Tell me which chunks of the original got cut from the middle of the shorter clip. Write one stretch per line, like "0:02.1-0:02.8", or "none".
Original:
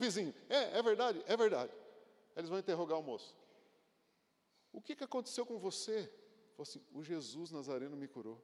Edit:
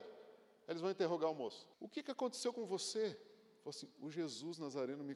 0:03.4-0:04.7